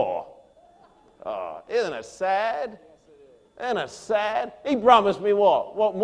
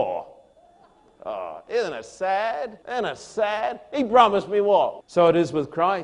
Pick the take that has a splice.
second; 2 cuts; at 2.8 s, 5.0 s

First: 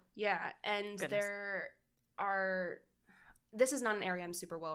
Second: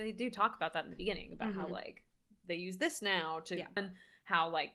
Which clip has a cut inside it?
second; 1 cut; at 3.8 s

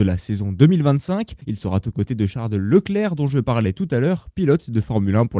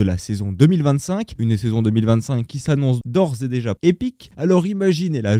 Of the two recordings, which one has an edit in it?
second; 3 cuts; at 1.4 s, 3.0 s, 4.3 s

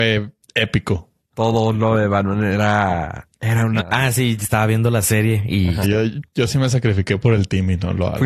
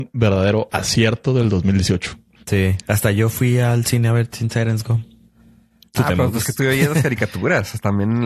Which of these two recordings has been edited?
first; 3 cuts; at 1.3 s, 3.8 s, 5.8 s

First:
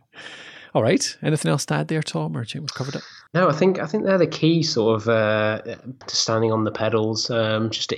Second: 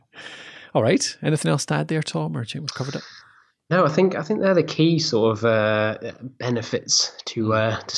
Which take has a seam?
first; 2 cuts; at 3.3 s, 6.0 s

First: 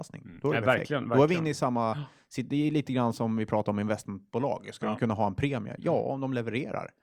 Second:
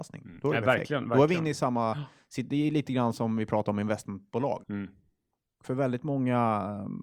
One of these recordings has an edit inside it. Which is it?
second; 1 cut; at 4.6 s

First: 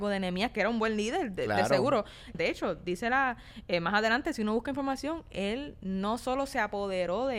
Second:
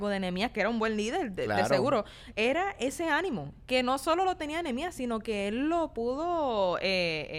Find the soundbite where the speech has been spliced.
first; 1 cut; at 2.3 s

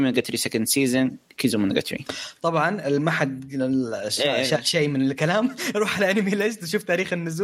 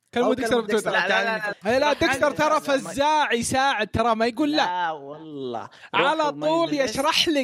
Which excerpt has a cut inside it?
second; 1 cut; at 1.5 s

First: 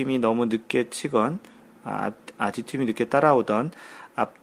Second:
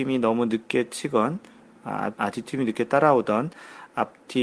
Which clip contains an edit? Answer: second; 1 cut; at 2.1 s

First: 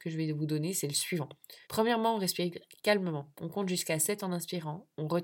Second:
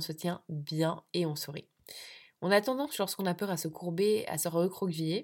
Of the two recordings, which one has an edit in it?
first; 1 cut; at 1.6 s

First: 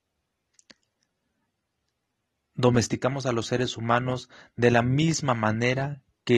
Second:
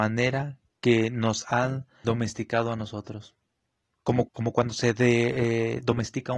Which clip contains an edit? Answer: second; 2 cuts; at 2.0 s, 4.3 s

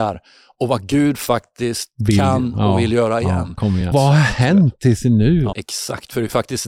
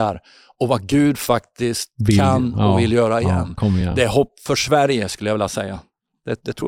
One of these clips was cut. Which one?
first; 2 cuts; at 3.9 s, 5.5 s

